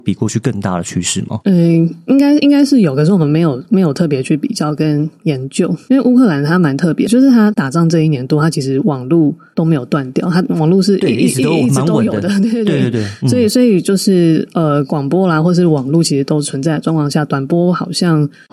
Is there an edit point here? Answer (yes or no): yes